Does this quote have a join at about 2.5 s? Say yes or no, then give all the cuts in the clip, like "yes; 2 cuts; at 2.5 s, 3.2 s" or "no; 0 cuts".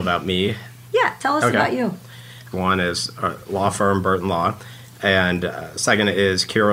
yes; 1 cut; at 2.5 s